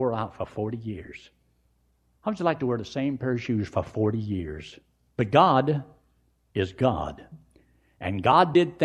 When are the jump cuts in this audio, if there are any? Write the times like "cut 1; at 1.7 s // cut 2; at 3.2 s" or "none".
cut 1; at 5.1 s